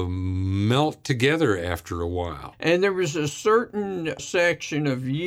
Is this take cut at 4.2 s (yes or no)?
yes